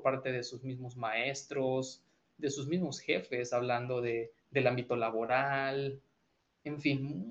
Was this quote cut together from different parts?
no; 0 cuts

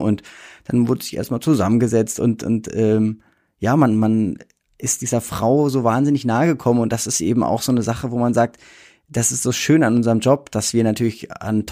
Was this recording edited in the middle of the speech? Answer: no; 0 cuts

